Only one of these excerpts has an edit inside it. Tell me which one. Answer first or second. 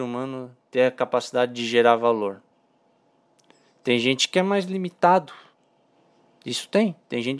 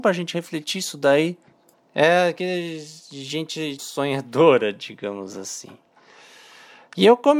second